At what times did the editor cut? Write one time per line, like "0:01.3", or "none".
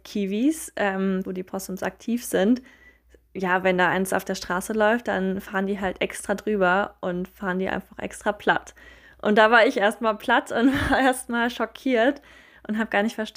0:01.2